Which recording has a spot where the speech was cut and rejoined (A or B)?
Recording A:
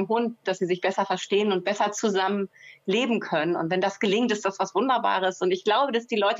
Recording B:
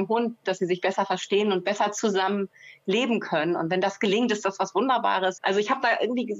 B